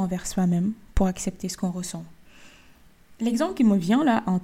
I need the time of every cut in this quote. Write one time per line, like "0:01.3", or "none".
none